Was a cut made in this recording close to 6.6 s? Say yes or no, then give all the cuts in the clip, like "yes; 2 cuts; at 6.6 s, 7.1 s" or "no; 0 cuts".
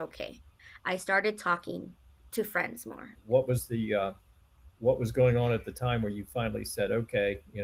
no; 2 cuts; at 3.1 s, 4.8 s